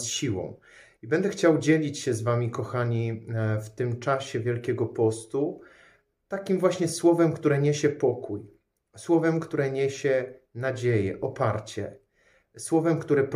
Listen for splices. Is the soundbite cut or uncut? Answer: uncut